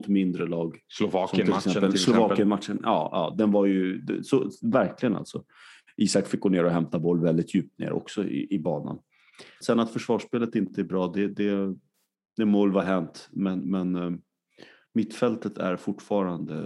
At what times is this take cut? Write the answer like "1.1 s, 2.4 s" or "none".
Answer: 9.6 s